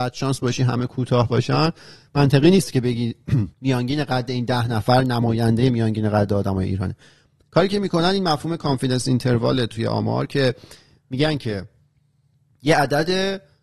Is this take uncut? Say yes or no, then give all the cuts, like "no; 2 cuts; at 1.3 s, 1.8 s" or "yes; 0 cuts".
no; 1 cut; at 3.5 s